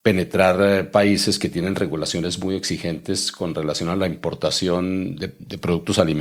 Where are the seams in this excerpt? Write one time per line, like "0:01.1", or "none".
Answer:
none